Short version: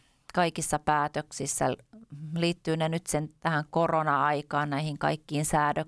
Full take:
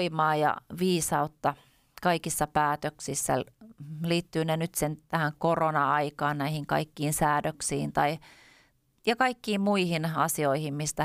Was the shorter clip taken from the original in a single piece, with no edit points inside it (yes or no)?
yes